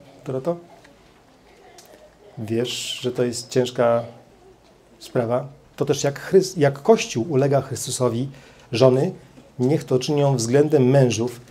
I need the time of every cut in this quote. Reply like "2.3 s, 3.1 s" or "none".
5.6 s